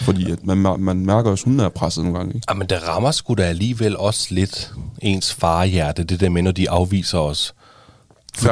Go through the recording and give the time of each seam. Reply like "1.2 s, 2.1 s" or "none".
none